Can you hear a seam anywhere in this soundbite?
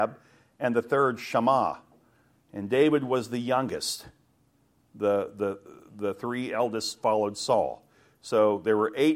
no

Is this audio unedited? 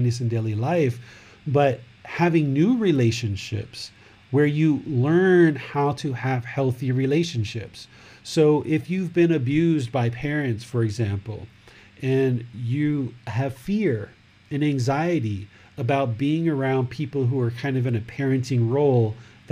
yes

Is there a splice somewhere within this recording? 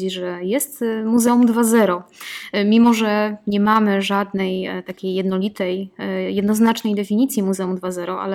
no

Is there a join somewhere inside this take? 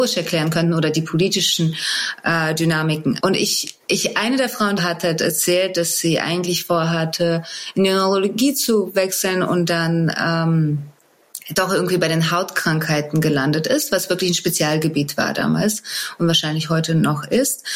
yes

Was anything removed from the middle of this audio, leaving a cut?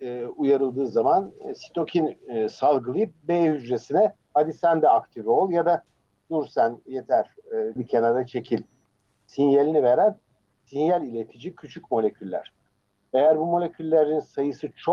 yes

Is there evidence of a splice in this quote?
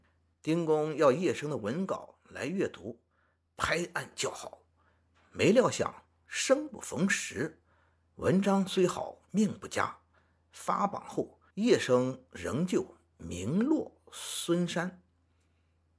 yes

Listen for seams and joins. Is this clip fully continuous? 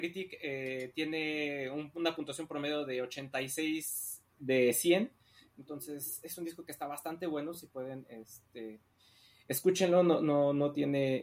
yes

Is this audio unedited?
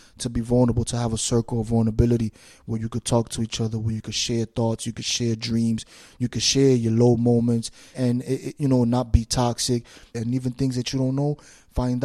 no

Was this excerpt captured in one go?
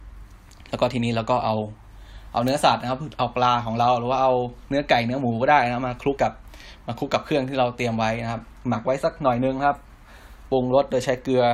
no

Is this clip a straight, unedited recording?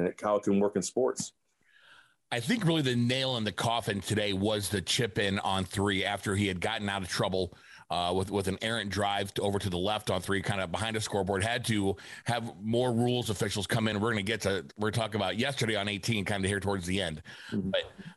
yes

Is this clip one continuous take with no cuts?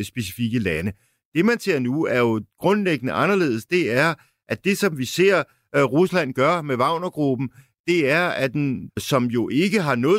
no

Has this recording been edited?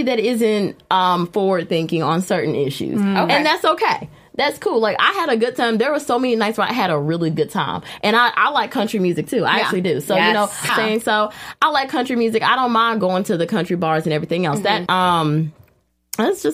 yes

